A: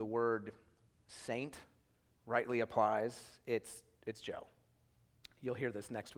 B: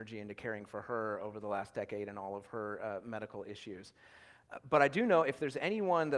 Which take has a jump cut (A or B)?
A